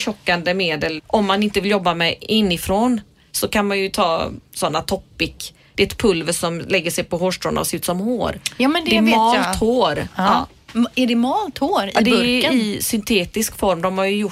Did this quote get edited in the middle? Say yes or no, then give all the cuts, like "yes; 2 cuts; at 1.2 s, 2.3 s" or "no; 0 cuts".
yes; 1 cut; at 1.0 s